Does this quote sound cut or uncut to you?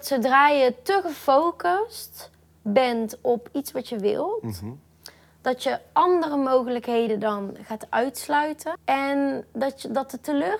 cut